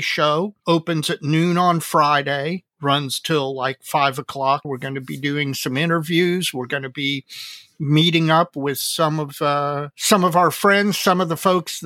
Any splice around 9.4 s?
no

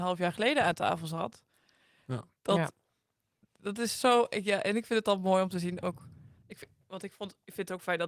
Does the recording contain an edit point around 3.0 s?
no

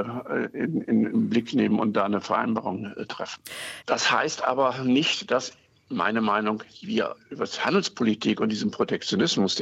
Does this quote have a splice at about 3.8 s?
yes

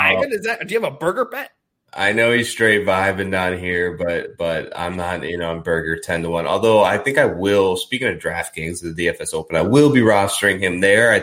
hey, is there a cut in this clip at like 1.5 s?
no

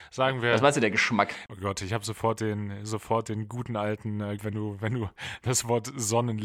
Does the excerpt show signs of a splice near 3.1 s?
no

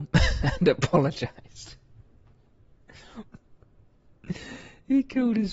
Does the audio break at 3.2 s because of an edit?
yes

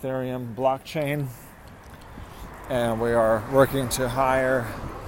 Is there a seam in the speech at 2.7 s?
no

